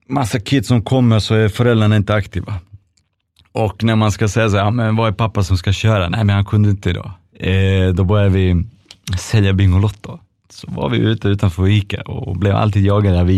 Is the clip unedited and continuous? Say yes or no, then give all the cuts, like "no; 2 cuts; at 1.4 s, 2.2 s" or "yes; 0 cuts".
no; 1 cut; at 7.3 s